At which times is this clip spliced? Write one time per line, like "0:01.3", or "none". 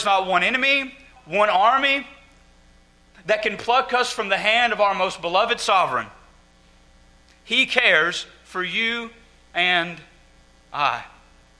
0:01.2